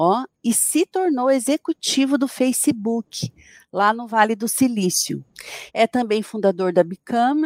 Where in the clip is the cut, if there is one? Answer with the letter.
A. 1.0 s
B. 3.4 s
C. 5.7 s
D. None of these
C